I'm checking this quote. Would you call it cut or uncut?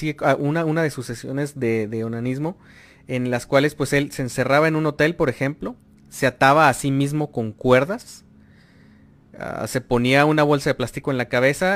uncut